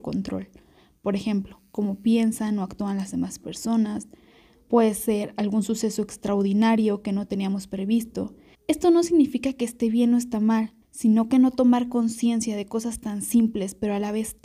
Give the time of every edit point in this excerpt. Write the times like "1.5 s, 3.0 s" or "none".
8.5 s, 10.8 s